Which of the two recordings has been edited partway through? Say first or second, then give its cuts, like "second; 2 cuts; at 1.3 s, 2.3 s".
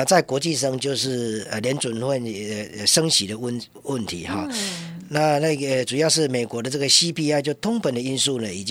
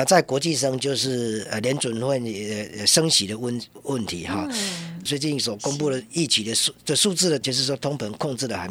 second; 2 cuts; at 5.1 s, 7.4 s